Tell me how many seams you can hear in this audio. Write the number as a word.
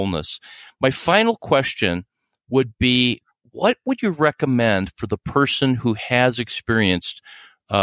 zero